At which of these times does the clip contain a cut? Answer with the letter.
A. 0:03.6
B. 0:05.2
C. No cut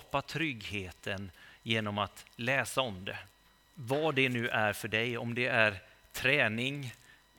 A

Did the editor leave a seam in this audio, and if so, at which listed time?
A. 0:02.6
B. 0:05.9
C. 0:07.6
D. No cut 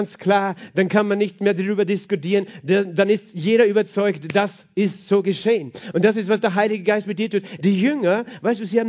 C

